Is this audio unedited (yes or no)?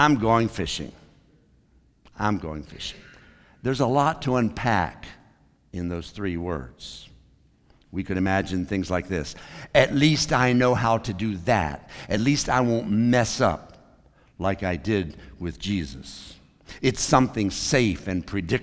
yes